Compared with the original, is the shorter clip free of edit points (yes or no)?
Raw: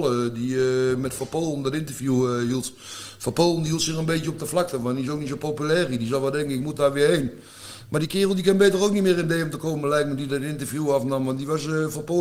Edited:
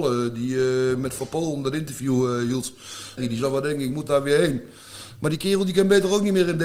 no